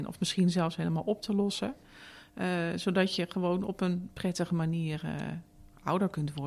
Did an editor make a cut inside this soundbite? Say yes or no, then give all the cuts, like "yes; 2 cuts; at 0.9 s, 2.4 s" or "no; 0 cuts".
no; 0 cuts